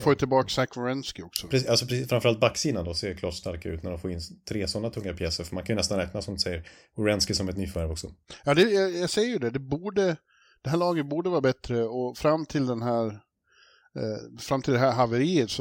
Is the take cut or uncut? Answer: uncut